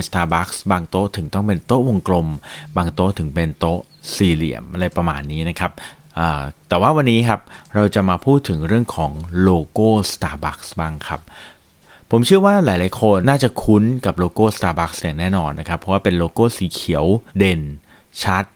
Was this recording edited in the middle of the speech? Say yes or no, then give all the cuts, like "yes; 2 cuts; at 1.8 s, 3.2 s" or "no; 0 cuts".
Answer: yes; 2 cuts; at 13.2 s, 17.3 s